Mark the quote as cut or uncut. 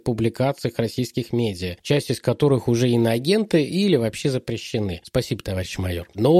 uncut